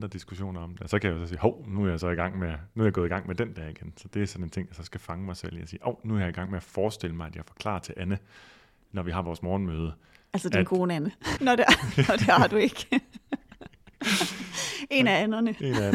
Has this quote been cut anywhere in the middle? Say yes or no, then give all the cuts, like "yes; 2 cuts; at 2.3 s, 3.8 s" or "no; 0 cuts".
yes; 1 cut; at 11.4 s